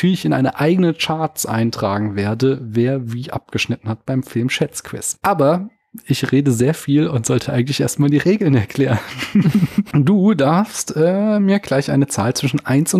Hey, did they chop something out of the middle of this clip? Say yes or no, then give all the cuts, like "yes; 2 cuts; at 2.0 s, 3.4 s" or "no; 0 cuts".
no; 0 cuts